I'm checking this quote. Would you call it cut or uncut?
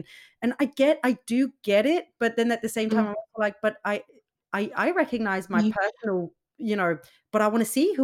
uncut